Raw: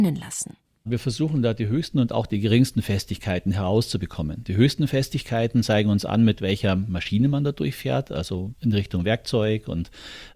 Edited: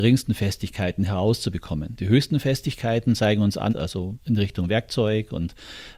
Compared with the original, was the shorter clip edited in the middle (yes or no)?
yes